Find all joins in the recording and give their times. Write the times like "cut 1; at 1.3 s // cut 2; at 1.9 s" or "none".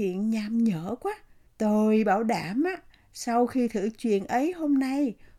cut 1; at 1.5 s